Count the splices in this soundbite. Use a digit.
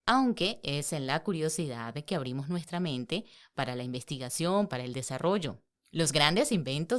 1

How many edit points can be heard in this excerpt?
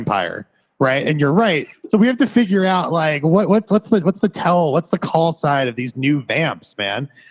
1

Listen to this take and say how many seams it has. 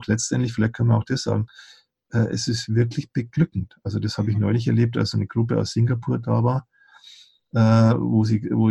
0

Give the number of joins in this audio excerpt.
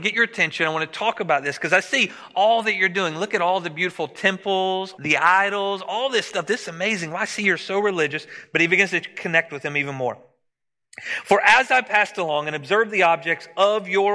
1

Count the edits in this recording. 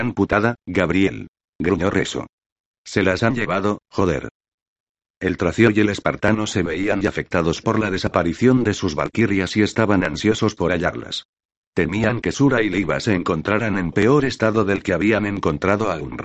1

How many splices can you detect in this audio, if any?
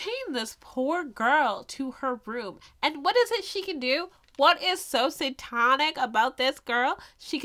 0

